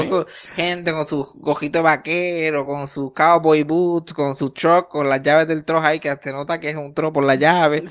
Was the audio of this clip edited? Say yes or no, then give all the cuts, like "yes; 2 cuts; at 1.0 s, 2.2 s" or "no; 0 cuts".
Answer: no; 0 cuts